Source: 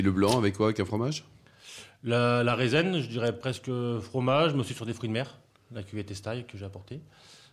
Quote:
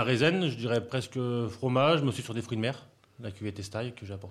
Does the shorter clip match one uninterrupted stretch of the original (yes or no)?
yes